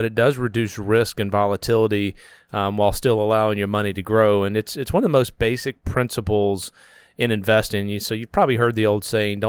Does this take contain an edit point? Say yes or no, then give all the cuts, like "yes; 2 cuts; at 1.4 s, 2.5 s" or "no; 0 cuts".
no; 0 cuts